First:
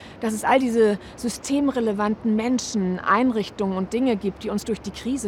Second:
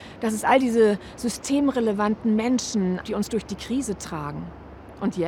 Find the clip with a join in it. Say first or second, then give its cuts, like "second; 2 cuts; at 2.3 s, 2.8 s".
second; 1 cut; at 3.0 s